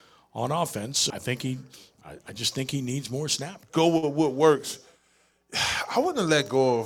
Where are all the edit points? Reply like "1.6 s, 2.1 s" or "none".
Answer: 1.1 s, 3.6 s